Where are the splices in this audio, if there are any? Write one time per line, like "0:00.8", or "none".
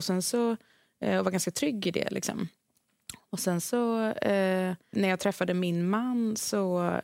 0:04.9